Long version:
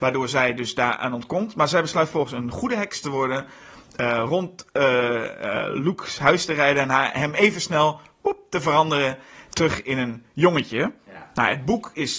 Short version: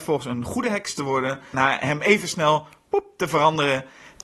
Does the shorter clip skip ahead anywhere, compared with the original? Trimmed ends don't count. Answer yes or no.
yes